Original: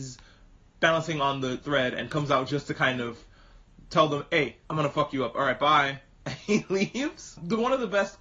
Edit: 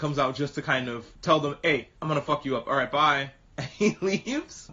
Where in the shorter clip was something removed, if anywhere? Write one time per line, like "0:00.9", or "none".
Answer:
0:01.2